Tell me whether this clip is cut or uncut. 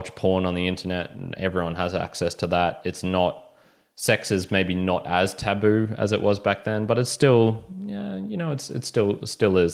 uncut